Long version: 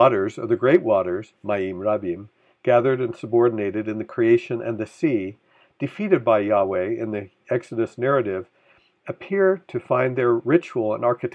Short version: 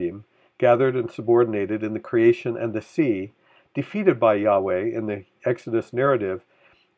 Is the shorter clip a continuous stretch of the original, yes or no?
yes